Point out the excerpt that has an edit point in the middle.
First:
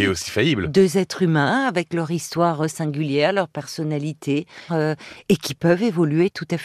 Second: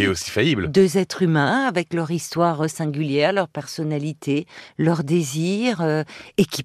first; 1 cut; at 4.7 s

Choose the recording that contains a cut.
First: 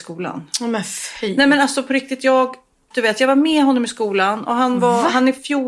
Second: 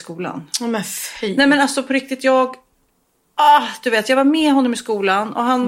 first; 1 cut; at 2.9 s

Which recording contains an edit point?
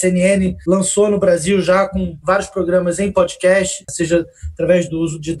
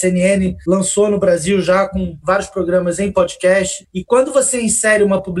first; 1 cut; at 3.9 s

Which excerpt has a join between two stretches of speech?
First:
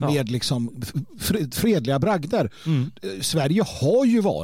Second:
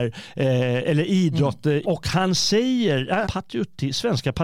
second; 2 cuts; at 1.8 s, 3.2 s

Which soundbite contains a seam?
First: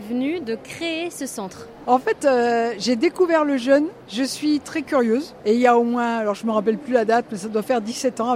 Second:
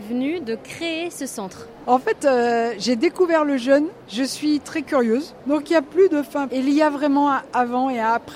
second; 2 cuts; at 5.4 s, 6.5 s

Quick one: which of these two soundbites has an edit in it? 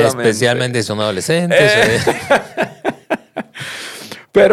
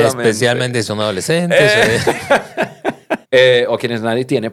second; 1 cut; at 3.2 s

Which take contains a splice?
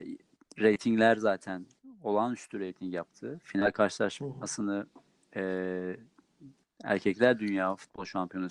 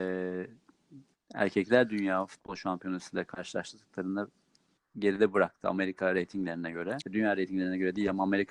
second; 1 cut; at 7.0 s

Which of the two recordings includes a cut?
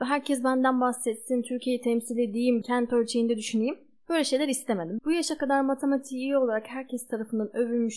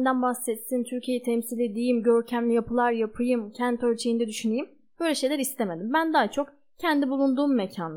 first; 2 cuts; at 2.6 s, 5.0 s

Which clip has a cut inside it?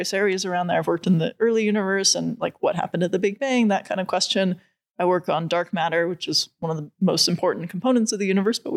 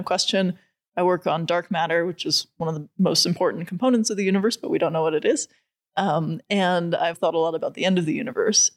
second; 1 cut; at 7.1 s

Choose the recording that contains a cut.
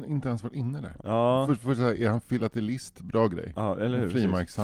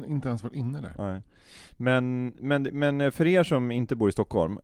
first; 1 cut; at 1.0 s

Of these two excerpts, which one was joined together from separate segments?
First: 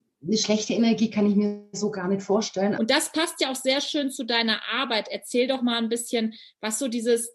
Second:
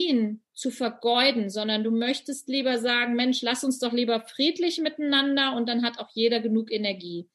first; 1 cut; at 2.7 s

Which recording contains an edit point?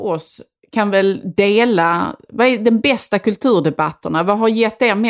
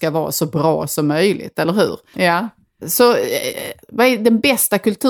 second; 2 cuts; at 2.1 s, 3.8 s

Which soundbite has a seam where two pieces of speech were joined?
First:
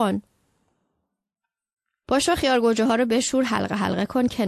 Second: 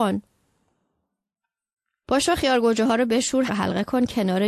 second; 1 cut; at 3.5 s

